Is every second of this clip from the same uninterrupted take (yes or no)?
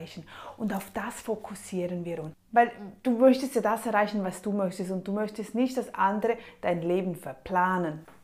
no